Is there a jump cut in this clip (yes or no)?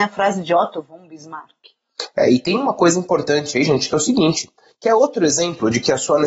no